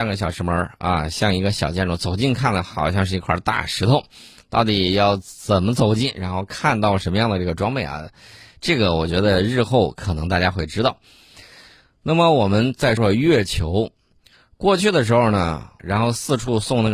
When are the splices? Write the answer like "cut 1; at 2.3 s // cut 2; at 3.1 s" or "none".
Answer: cut 1; at 13.0 s // cut 2; at 15.8 s